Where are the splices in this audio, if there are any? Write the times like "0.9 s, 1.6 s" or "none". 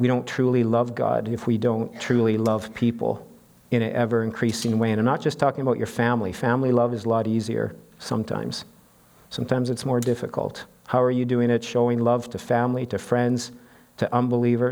none